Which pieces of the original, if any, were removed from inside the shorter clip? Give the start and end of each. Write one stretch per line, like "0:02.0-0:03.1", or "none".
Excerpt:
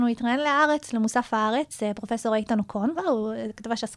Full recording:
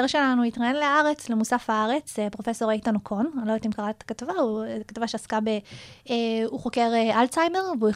0:03.3-0:04.3